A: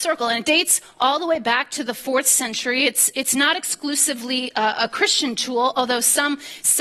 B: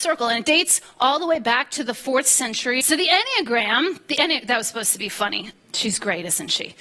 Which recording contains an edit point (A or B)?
B